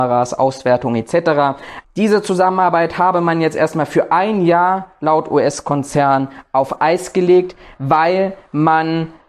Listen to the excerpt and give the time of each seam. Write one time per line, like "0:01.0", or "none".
0:01.8